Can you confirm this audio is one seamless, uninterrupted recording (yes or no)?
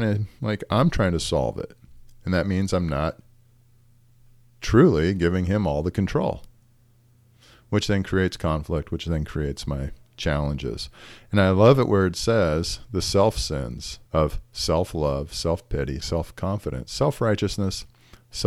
no